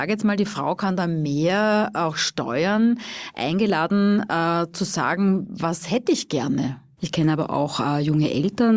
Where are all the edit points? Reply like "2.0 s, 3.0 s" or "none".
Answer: 7.0 s